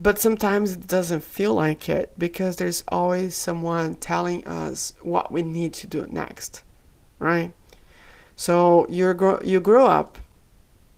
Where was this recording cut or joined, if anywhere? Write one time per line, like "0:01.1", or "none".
none